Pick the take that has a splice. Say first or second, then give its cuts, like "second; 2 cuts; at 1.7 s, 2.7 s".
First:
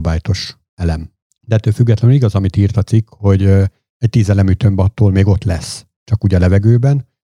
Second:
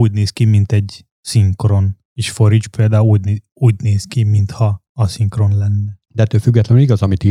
second; 1 cut; at 6.0 s